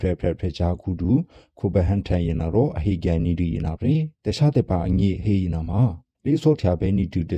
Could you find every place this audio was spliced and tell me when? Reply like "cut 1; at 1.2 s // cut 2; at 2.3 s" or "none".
cut 1; at 4.1 s